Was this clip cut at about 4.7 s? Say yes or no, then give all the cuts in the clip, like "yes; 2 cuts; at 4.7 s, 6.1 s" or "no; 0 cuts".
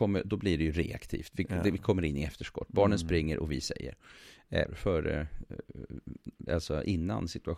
yes; 2 cuts; at 4.7 s, 6.5 s